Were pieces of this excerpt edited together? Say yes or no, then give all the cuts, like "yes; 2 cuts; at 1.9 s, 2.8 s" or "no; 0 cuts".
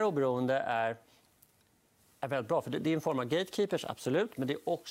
no; 0 cuts